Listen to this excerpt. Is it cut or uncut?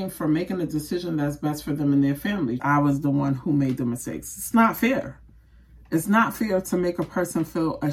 cut